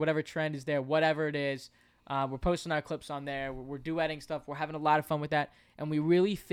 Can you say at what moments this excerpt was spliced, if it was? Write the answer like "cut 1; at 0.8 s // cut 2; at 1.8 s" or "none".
none